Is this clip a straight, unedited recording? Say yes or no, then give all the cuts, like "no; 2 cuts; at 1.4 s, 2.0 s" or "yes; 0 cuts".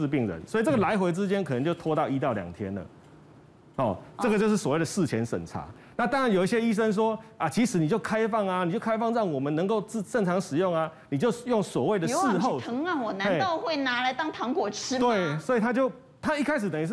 yes; 0 cuts